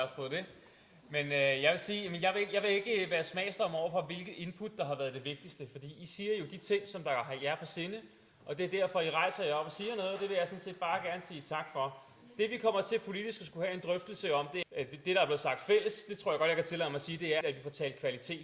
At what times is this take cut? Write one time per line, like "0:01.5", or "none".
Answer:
0:14.6
0:17.4